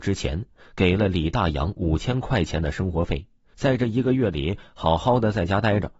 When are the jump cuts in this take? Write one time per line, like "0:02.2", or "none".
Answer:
0:03.5